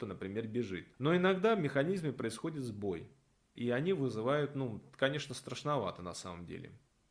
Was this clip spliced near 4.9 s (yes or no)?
no